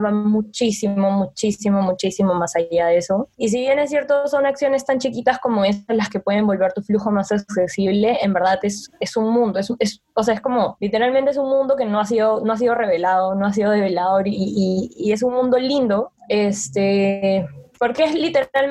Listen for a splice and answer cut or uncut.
uncut